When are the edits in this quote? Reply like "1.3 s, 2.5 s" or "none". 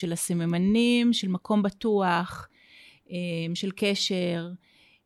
none